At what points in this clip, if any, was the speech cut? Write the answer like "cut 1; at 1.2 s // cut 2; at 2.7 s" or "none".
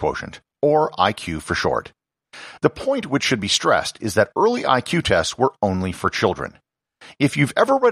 cut 1; at 2.6 s